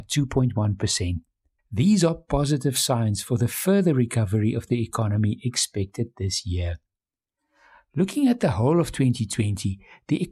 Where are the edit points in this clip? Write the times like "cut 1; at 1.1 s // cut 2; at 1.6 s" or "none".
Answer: cut 1; at 1.6 s